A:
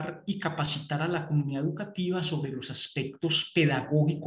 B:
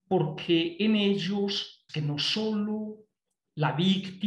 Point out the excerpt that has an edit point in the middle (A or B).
B